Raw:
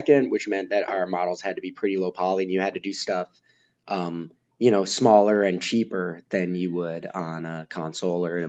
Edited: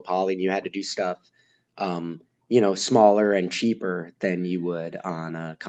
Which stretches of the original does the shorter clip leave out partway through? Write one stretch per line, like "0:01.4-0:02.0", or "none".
none